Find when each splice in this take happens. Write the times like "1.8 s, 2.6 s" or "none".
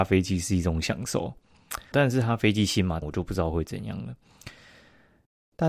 1.9 s, 3.0 s